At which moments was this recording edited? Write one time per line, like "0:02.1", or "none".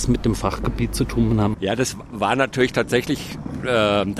0:01.5